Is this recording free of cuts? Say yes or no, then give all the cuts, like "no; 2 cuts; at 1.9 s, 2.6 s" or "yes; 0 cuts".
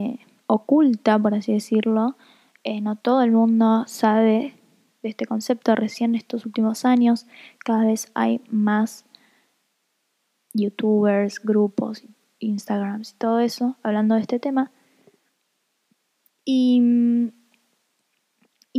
yes; 0 cuts